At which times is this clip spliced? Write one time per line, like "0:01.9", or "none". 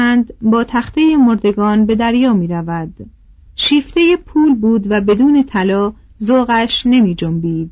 0:03.5